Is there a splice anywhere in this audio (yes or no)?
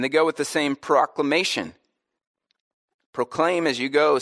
no